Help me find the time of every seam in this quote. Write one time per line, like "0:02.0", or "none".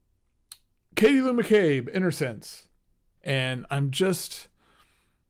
0:03.2